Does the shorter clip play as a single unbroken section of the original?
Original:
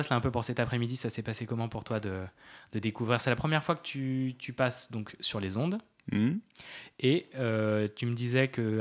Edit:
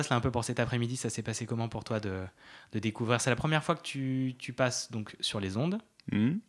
yes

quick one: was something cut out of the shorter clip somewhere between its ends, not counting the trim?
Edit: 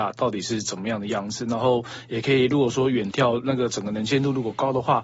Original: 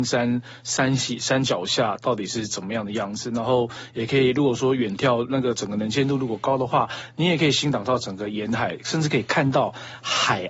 no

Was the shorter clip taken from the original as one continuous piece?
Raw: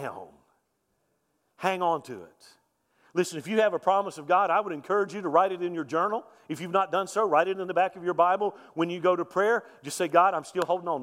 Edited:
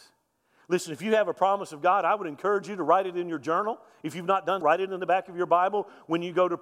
no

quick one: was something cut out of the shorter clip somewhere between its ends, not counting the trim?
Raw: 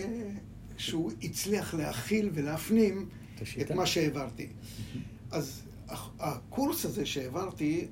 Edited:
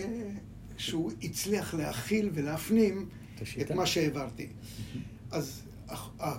no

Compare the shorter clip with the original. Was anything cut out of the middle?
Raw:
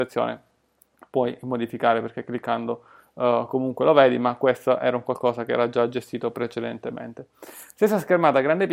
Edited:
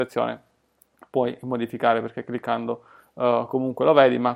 no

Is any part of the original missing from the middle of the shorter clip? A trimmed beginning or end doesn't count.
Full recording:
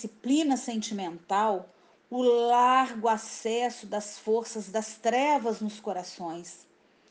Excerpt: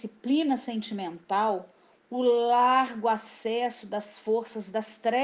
no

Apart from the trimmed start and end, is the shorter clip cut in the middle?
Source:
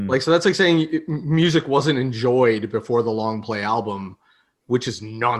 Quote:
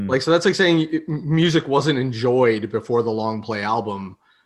no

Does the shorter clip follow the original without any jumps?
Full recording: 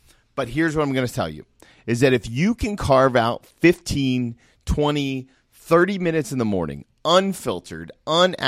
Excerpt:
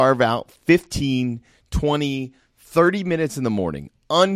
yes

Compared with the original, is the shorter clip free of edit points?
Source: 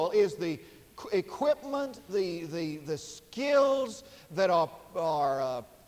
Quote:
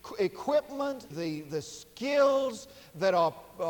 no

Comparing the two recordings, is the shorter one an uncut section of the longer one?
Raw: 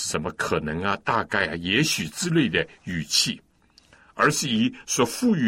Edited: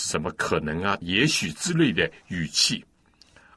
no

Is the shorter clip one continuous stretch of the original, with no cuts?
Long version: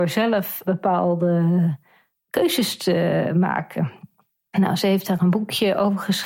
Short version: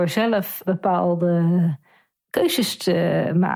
yes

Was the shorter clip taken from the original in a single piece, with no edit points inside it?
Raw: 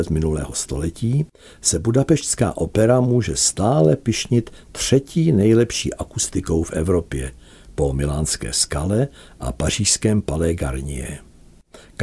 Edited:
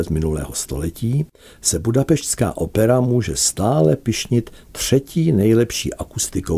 yes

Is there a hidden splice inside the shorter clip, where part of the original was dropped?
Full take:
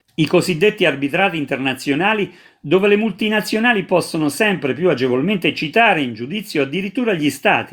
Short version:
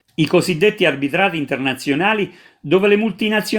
no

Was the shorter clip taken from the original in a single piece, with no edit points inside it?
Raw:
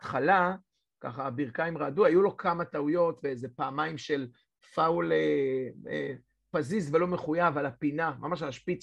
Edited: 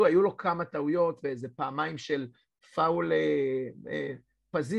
yes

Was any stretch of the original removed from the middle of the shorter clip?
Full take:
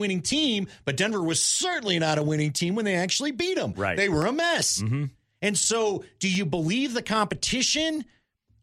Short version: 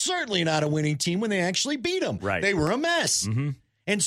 no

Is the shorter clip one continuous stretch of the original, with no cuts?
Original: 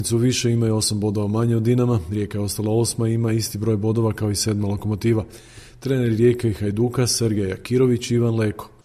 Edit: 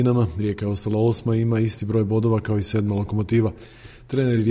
yes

